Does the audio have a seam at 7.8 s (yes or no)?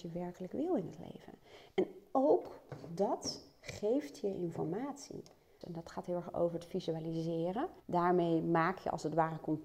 yes